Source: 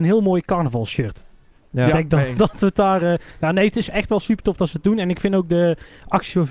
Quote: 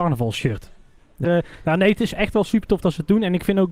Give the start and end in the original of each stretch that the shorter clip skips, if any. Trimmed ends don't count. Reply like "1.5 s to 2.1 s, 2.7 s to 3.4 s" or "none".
1.8 s to 3.0 s